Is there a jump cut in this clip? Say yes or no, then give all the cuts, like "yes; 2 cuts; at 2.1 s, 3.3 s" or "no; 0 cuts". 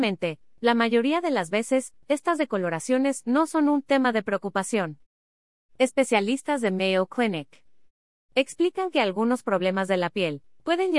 no; 0 cuts